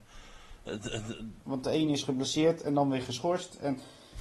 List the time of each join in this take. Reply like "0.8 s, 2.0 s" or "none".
1.4 s